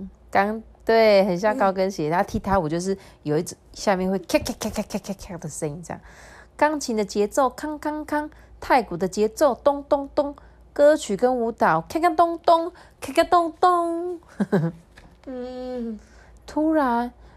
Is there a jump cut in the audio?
yes; 1 cut; at 16.4 s

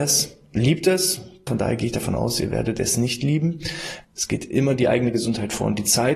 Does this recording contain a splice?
yes; 2 cuts; at 1.5 s, 4.0 s

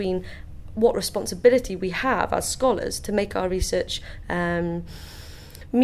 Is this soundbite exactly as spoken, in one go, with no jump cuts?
yes; 0 cuts

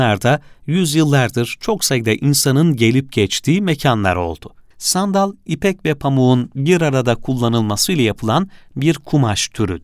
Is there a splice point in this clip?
yes; 1 cut; at 4.7 s

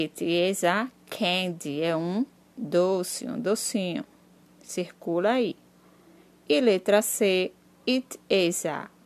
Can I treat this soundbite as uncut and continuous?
yes; 0 cuts

